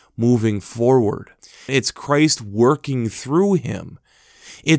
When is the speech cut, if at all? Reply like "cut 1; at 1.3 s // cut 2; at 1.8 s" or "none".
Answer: cut 1; at 1.7 s